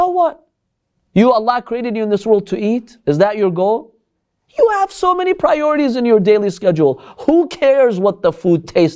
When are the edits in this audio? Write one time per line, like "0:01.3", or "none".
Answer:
none